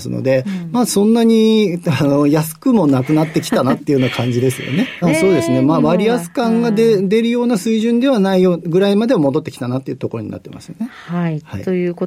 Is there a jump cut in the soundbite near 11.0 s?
no; 1 cut; at 5.0 s

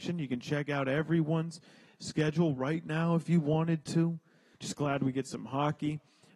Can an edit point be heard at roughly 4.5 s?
yes; 1 cut; at 4.5 s

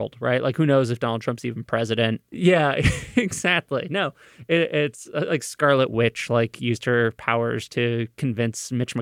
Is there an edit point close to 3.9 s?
no; 1 cut; at 2.3 s

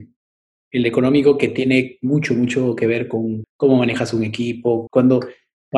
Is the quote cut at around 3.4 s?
yes; 2 cuts; at 3.4 s, 4.9 s

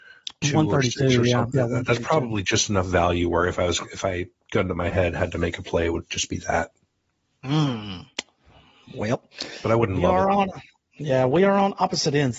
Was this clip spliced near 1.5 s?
yes; 1 cut; at 1.5 s

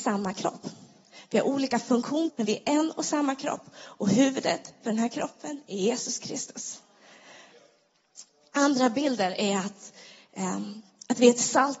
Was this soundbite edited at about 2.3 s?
yes; 1 cut; at 2.3 s

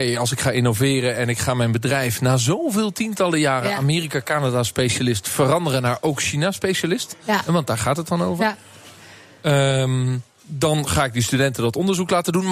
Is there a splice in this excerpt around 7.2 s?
no; 0 cuts

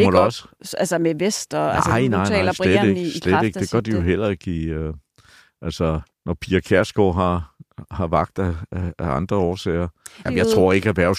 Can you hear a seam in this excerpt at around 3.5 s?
no; 2 cuts; at 6.1 s, 10.3 s

